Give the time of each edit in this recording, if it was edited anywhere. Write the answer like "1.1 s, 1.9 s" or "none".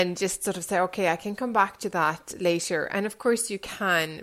none